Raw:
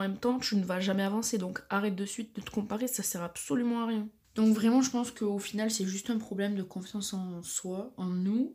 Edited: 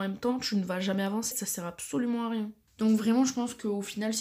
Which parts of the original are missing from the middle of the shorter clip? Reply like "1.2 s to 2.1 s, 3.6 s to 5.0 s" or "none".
1.3 s to 2.9 s